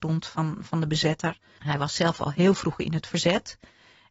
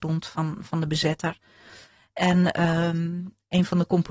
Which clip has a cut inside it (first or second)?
first